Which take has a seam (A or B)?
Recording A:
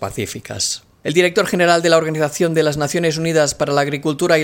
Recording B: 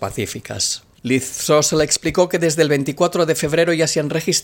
B